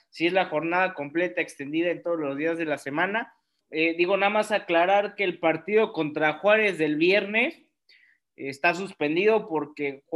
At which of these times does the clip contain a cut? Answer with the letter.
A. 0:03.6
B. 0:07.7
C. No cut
A